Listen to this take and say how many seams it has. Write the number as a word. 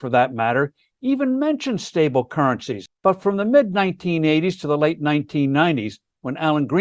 one